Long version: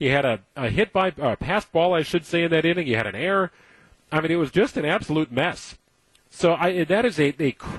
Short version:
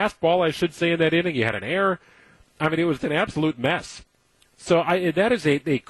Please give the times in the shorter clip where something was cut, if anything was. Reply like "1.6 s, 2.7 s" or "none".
3.0 s